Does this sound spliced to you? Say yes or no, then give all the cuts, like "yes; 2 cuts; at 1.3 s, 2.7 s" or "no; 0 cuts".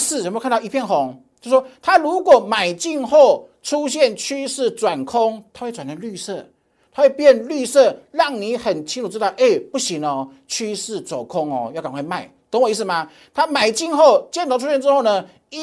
no; 0 cuts